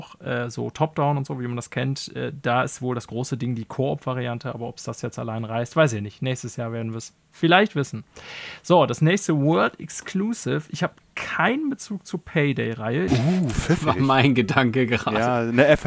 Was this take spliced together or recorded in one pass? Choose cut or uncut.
cut